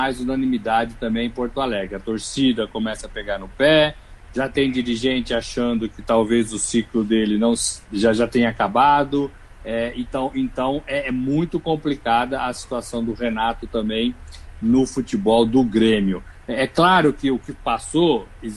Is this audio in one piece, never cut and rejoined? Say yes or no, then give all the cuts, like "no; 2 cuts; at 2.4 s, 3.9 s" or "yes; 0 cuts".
yes; 0 cuts